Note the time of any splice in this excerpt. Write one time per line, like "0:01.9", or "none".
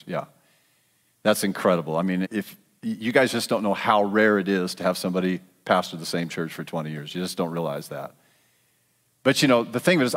0:02.2